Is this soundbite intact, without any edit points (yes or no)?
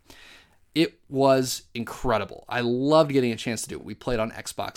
yes